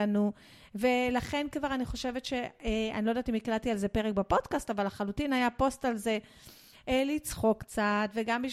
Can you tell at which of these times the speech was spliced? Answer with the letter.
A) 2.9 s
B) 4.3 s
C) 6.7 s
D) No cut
C